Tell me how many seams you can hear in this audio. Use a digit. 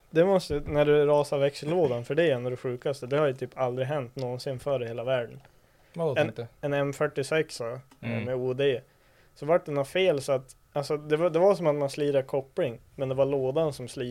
1